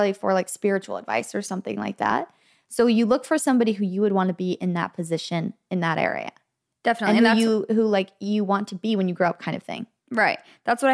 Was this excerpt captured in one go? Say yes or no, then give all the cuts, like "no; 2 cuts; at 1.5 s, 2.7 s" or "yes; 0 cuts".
yes; 0 cuts